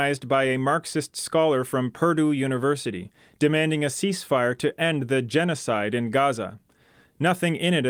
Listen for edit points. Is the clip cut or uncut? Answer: uncut